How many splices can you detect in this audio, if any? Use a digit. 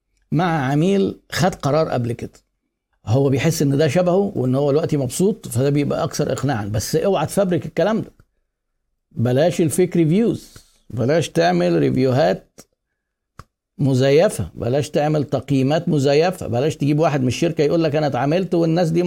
0